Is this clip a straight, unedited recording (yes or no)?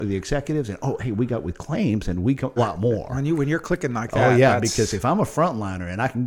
no